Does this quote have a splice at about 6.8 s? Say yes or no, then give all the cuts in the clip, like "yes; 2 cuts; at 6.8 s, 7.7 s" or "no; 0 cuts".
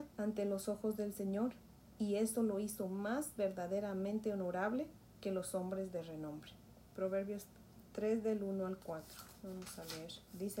yes; 1 cut; at 6.8 s